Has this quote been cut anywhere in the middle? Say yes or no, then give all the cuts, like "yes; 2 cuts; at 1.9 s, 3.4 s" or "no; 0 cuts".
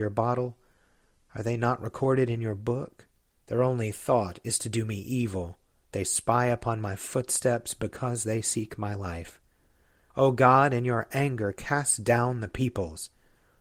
yes; 3 cuts; at 3.4 s, 5.9 s, 10.1 s